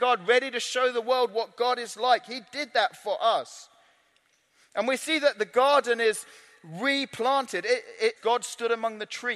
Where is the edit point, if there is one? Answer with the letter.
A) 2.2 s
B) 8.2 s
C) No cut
B